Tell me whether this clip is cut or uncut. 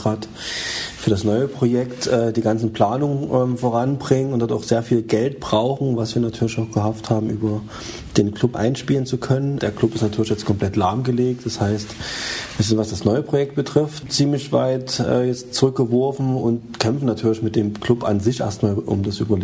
uncut